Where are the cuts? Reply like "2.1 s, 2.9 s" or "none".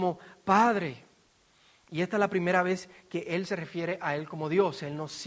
none